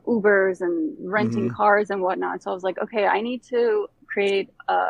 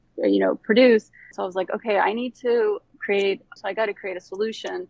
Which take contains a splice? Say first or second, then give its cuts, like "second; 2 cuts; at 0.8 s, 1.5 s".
second; 2 cuts; at 1.3 s, 3.6 s